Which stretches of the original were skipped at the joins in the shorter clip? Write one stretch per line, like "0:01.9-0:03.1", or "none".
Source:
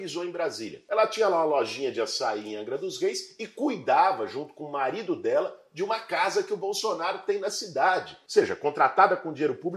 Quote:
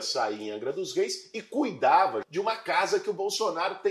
0:04.3-0:05.7